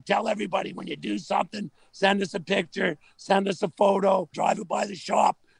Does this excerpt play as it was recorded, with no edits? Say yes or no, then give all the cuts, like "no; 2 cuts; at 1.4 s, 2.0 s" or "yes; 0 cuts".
no; 1 cut; at 4.3 s